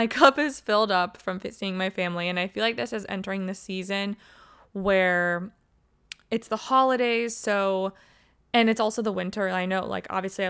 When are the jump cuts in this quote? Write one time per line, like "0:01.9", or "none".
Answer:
none